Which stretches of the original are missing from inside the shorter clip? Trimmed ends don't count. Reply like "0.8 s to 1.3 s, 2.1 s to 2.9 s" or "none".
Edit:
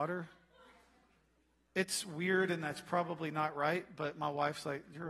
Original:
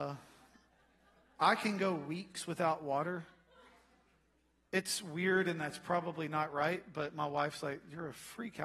none